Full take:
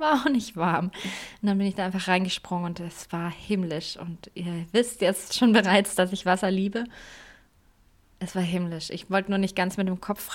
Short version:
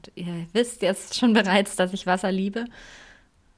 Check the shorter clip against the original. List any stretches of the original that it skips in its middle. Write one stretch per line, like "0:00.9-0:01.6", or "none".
none